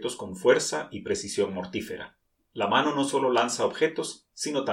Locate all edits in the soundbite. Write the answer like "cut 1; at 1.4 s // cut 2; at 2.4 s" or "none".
cut 1; at 2.4 s